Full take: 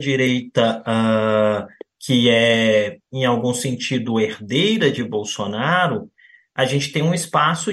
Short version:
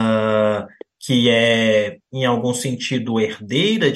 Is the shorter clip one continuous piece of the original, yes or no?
yes